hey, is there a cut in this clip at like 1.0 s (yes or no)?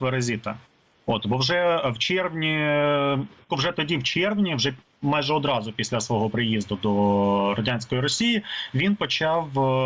no